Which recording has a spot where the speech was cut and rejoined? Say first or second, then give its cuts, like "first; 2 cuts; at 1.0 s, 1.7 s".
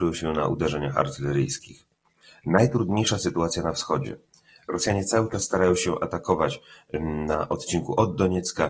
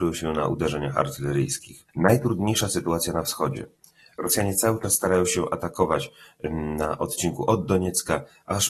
second; 1 cut; at 1.9 s